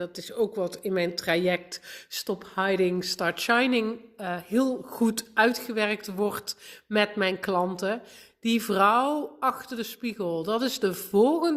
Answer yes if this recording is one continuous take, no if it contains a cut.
yes